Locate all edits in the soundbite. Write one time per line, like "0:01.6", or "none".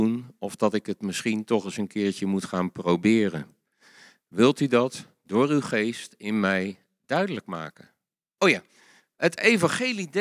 0:08.4